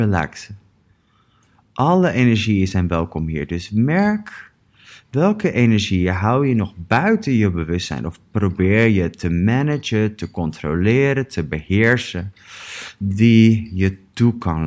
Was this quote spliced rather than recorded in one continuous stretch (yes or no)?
no